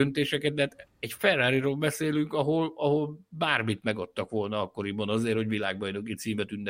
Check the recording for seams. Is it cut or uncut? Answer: uncut